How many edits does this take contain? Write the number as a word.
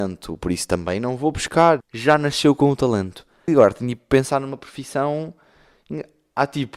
two